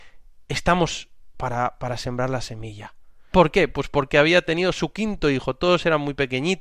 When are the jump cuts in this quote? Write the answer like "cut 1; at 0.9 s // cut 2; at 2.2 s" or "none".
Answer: cut 1; at 3.3 s